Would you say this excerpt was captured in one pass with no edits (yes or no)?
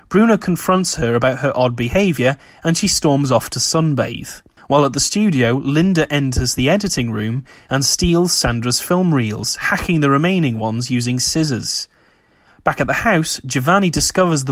no